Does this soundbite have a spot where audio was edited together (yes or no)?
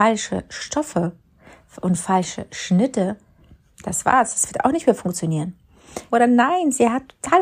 yes